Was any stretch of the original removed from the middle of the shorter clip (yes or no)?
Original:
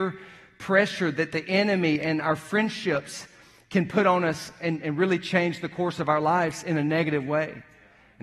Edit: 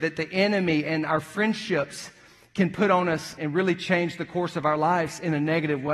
yes